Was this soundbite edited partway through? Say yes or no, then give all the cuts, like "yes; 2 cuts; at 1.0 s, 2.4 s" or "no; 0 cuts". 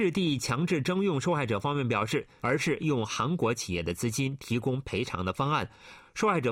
yes; 1 cut; at 2.4 s